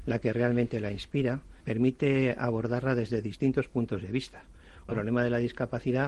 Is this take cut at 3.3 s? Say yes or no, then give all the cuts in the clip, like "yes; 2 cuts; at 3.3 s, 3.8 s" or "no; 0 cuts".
no; 1 cut; at 4.9 s